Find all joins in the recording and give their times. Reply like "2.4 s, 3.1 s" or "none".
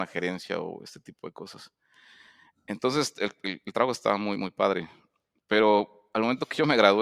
none